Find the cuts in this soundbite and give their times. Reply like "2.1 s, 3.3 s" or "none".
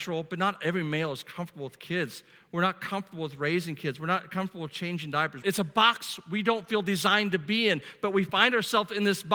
5.4 s